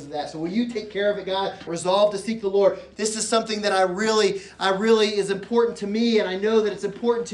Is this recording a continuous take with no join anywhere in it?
no; 2 cuts; at 1.7 s, 2.9 s

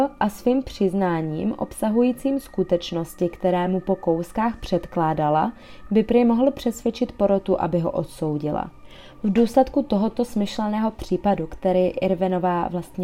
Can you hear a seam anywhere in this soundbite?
no; 0 cuts

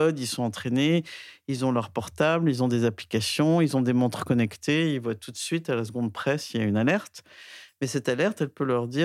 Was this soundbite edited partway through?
no; 0 cuts

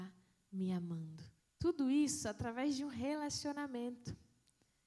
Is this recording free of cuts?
no; 1 cut; at 1.4 s

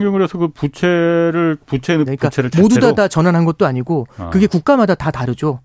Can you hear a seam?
yes; 1 cut; at 2.1 s

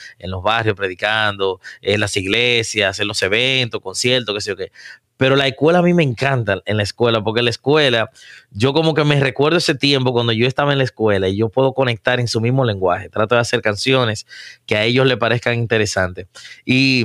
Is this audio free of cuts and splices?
yes; 0 cuts

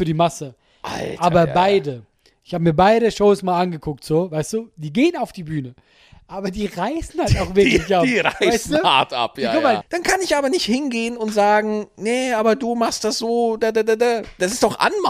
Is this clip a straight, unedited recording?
no; 1 cut; at 9.8 s

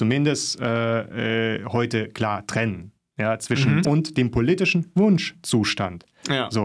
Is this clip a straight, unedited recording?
no; 1 cut; at 3.8 s

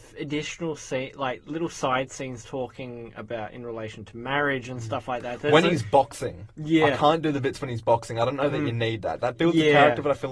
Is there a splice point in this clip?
no; 0 cuts

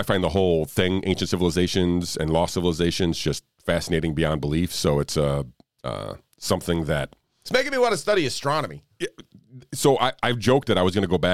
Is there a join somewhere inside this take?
no; 0 cuts

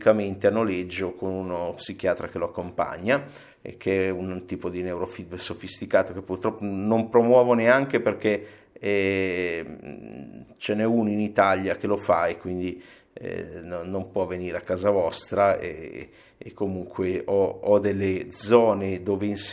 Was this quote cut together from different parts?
no; 0 cuts

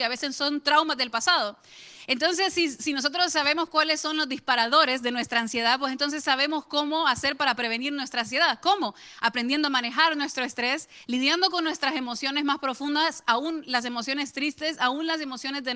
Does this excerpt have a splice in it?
no; 0 cuts

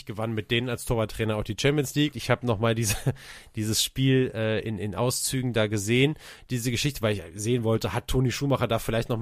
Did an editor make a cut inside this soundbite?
yes; 1 cut; at 2.1 s

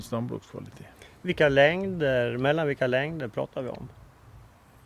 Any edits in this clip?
no; 0 cuts

